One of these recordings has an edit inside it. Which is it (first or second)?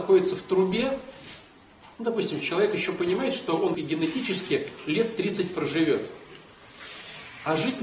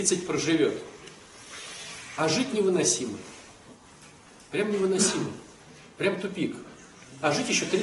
first